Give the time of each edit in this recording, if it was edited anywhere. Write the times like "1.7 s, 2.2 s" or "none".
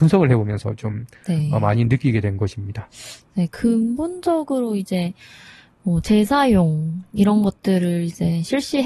none